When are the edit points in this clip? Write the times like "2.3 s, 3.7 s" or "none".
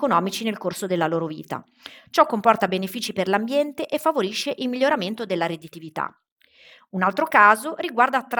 none